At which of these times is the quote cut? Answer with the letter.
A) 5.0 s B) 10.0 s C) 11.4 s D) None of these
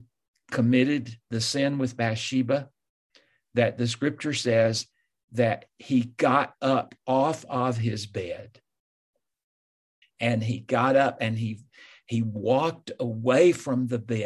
B